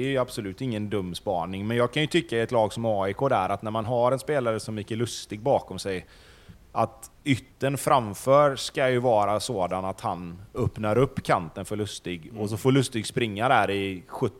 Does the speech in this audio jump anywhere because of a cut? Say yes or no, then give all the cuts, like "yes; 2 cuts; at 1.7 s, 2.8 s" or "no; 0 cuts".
no; 0 cuts